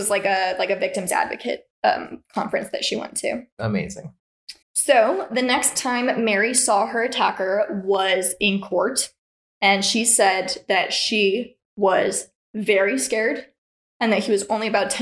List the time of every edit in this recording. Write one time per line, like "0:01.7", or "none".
0:04.6